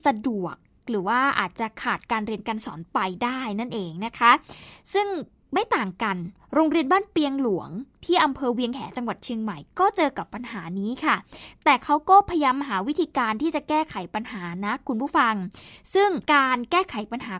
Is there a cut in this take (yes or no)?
yes